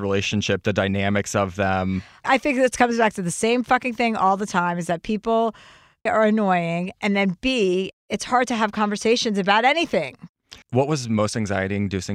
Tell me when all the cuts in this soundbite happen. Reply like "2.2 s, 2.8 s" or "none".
6.1 s, 10.6 s